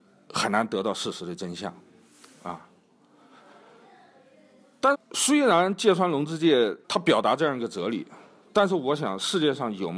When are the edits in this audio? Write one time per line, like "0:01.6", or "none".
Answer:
0:04.9
0:06.8

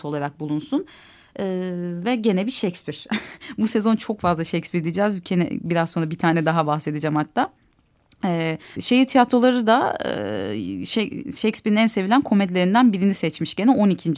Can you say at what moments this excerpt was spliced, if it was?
0:08.8

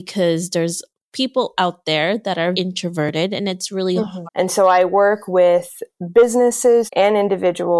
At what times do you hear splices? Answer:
0:02.5
0:04.3
0:06.9

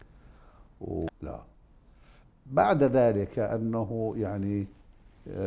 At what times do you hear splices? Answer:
0:01.1

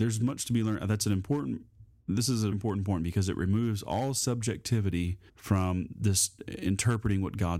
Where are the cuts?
0:02.5
0:05.3

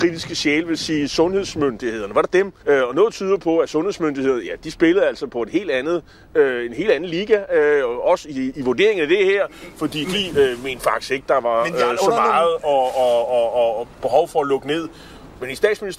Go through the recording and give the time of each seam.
0:02.6

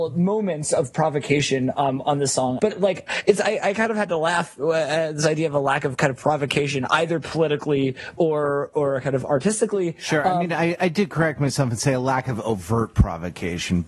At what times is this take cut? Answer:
0:02.6

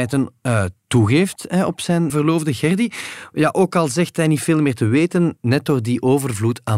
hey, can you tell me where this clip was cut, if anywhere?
0:02.1

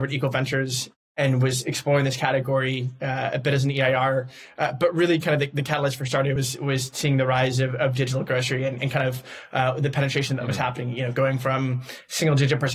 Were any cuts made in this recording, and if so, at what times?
none

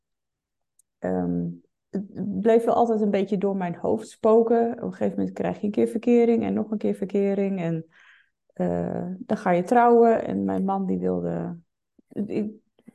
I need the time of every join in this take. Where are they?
none

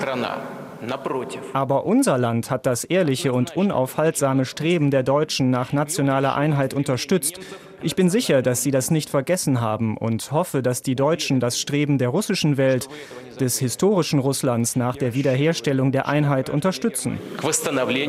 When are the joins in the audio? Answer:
none

